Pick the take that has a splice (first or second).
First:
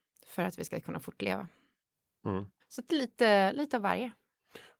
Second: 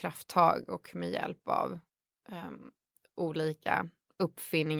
first